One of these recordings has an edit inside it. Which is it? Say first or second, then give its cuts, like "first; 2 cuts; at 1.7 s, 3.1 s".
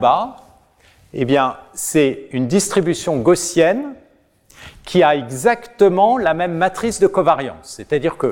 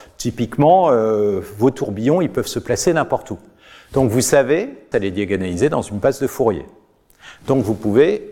second; 1 cut; at 4.9 s